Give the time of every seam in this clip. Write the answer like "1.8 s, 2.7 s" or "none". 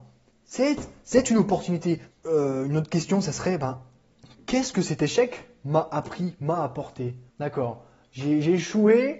2.1 s, 7.3 s